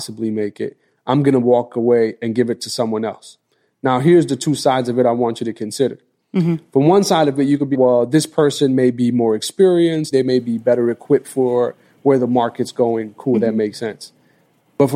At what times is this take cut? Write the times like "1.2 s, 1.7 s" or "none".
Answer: 7.7 s, 10.1 s